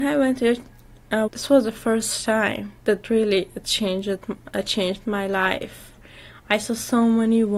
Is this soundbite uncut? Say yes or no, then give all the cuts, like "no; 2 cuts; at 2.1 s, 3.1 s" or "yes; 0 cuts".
no; 2 cuts; at 1.3 s, 2.8 s